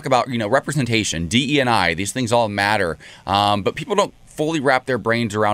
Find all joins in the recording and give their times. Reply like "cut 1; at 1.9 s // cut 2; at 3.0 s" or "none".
none